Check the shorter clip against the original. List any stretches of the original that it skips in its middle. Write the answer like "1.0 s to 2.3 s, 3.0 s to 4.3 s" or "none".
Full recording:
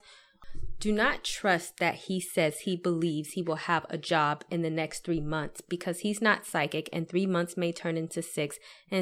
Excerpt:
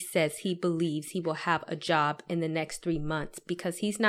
none